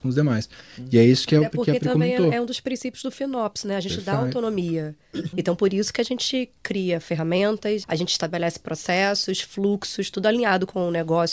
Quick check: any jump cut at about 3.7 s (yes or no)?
no